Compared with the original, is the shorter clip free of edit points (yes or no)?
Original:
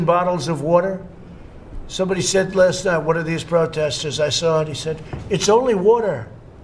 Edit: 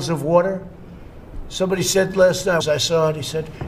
no